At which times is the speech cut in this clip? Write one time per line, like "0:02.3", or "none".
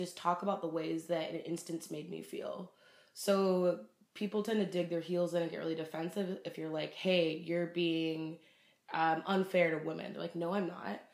none